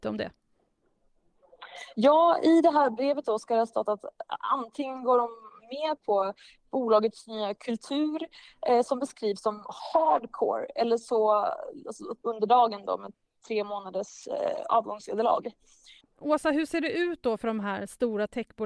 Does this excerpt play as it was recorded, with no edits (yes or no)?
no